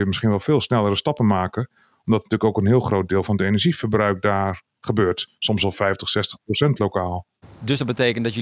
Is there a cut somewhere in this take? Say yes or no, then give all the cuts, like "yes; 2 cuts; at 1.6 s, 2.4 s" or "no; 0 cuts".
yes; 1 cut; at 7.4 s